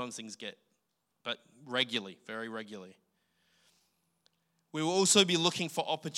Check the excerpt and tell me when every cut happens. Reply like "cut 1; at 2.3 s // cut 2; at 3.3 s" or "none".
cut 1; at 1.1 s